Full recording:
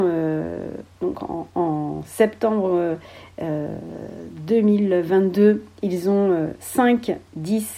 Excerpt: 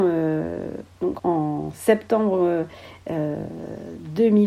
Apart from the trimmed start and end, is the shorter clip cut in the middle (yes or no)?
yes